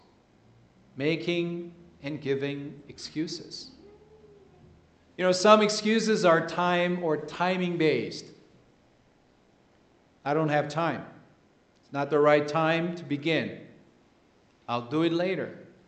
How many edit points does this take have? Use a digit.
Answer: 0